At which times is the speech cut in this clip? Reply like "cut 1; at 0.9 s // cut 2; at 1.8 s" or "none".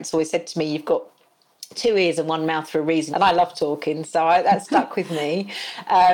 cut 1; at 3.1 s // cut 2; at 4.6 s